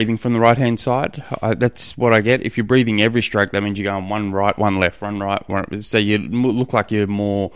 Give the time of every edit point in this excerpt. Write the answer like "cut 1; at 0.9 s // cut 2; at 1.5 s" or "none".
none